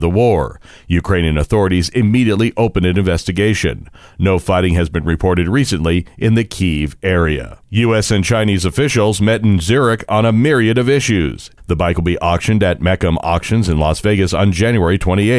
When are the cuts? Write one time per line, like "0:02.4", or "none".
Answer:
0:07.6
0:11.6